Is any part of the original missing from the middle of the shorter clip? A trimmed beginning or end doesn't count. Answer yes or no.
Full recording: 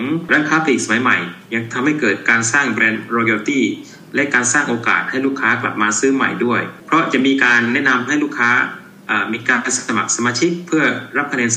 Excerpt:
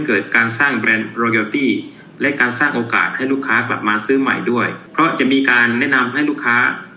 no